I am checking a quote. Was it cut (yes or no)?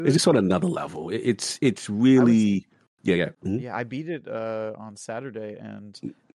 yes